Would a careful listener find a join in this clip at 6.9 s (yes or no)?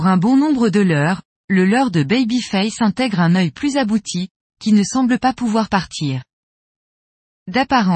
no